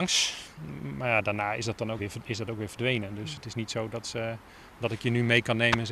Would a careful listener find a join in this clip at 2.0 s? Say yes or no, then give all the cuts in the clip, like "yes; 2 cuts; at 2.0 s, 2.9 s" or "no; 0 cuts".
yes; 1 cut; at 2.0 s